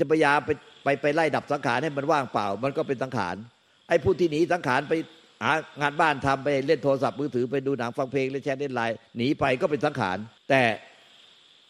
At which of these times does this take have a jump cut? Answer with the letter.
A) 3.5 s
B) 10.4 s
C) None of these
B